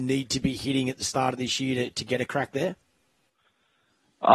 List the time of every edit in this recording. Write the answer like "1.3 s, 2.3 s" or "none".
none